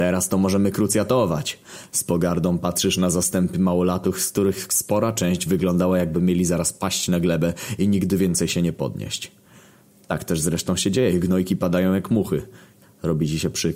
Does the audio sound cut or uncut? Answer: cut